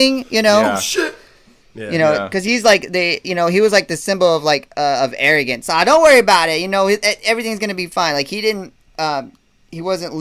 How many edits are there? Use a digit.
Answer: 0